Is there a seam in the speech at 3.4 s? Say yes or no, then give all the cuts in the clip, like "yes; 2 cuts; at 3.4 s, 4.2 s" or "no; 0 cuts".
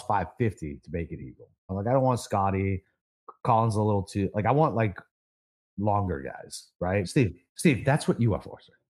no; 2 cuts; at 1.7 s, 7.0 s